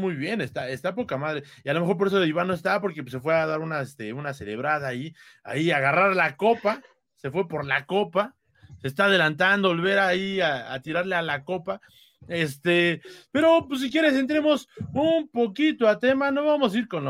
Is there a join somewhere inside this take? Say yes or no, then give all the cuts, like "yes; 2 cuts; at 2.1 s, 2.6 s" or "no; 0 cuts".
no; 0 cuts